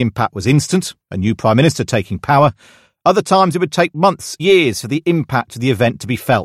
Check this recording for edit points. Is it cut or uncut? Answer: cut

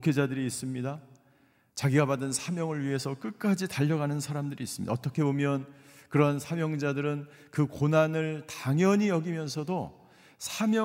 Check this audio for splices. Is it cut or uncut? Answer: uncut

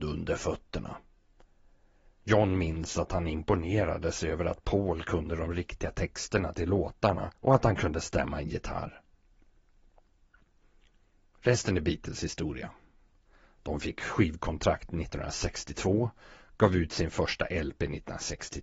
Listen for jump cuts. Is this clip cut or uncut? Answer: cut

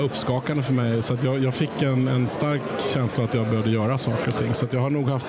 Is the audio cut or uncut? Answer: uncut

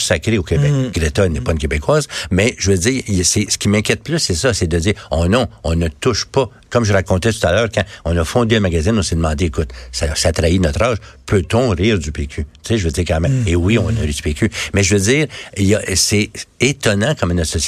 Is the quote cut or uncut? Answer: uncut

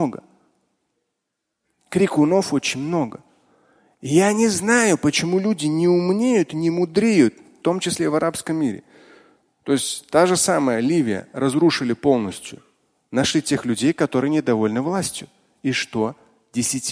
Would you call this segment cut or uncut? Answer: uncut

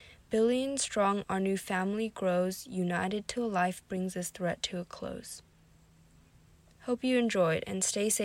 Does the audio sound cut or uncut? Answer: uncut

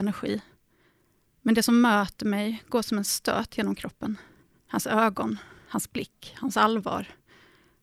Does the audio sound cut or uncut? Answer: uncut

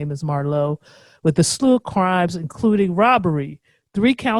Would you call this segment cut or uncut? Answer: uncut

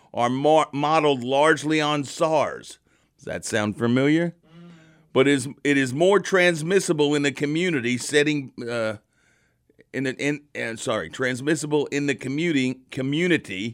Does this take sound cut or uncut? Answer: uncut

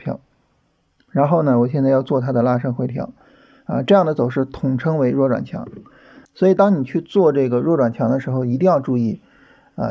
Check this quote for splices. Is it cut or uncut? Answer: cut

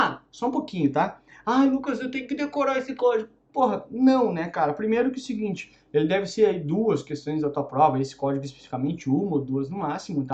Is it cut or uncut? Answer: uncut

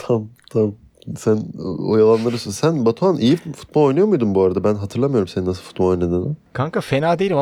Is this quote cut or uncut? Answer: uncut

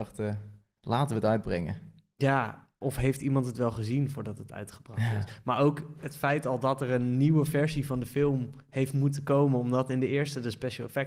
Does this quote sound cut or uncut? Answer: uncut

